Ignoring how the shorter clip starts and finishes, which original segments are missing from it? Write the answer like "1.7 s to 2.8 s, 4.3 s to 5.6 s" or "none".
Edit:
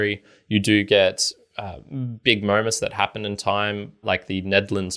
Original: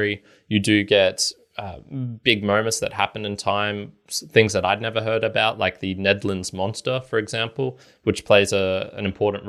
4.0 s to 5.6 s